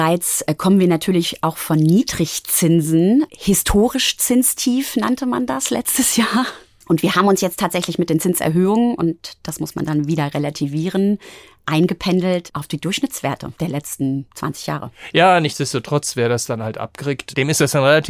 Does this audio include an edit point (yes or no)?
no